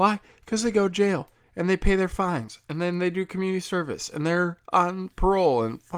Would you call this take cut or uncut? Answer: uncut